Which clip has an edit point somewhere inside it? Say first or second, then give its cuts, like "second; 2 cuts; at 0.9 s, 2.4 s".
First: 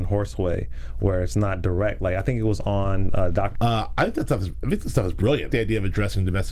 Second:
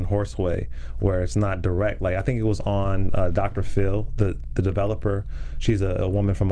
first; 2 cuts; at 3.5 s, 5.5 s